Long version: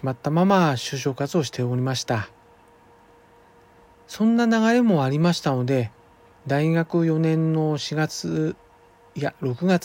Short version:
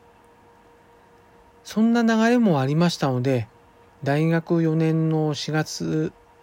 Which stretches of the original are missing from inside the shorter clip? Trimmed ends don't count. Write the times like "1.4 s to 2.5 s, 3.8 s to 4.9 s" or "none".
none